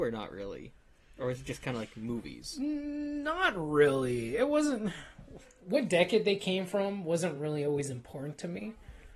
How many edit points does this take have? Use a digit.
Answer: 0